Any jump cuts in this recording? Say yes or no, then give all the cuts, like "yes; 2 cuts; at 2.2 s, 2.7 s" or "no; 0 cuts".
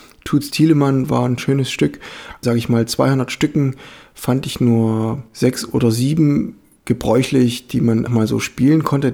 yes; 2 cuts; at 2.4 s, 8.1 s